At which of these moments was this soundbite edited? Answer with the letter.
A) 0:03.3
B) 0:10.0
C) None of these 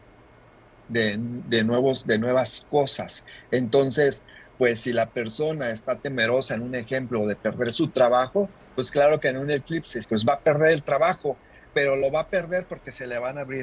B